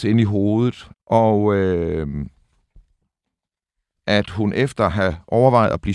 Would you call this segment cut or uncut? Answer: cut